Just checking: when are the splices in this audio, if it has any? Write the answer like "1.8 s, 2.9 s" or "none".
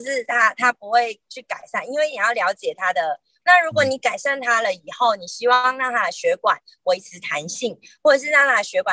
3.4 s